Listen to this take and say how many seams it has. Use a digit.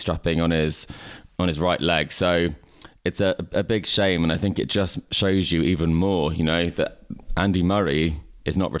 0